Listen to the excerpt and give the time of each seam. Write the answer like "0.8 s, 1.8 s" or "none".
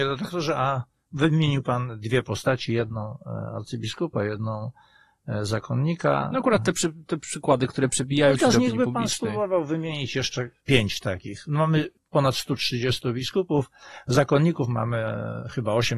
none